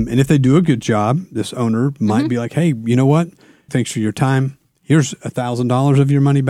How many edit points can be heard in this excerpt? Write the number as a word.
one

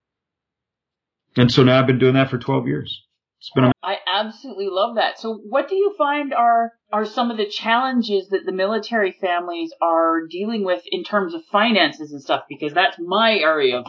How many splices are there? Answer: two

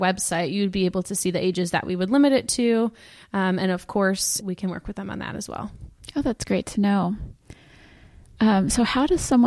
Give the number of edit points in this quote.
one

